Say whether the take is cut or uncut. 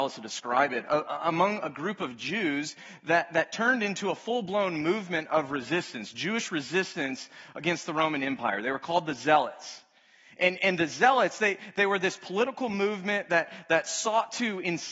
uncut